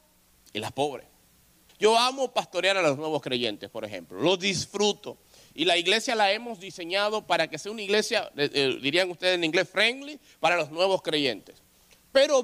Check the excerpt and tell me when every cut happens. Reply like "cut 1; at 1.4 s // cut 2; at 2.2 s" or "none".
cut 1; at 1.7 s

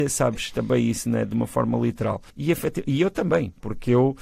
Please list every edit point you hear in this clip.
cut 1; at 2.3 s

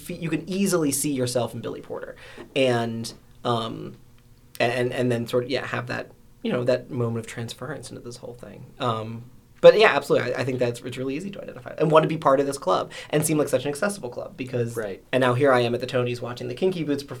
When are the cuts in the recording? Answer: cut 1; at 15.0 s

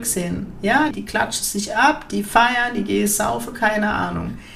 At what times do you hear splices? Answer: cut 1; at 0.9 s

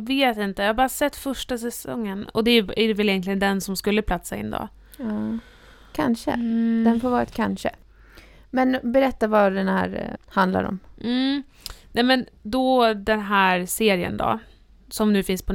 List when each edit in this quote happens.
cut 1; at 10.2 s

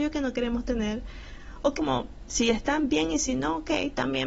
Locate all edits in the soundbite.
cut 1; at 1.8 s

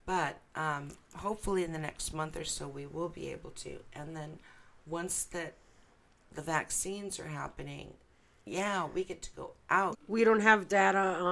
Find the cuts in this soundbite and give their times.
cut 1; at 9.9 s

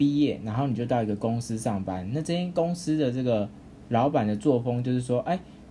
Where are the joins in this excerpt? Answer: none

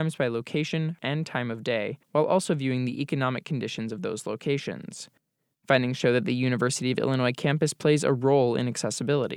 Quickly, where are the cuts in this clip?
cut 1; at 1.0 s

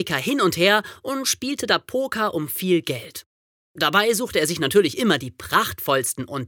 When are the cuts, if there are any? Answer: none

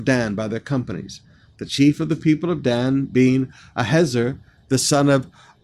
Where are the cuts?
none

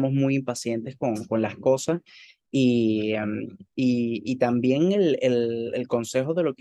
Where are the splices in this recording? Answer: none

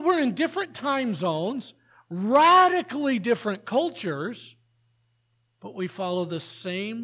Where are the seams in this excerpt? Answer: none

